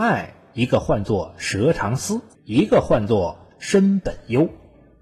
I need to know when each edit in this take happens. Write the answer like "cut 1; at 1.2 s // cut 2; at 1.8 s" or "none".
cut 1; at 2.3 s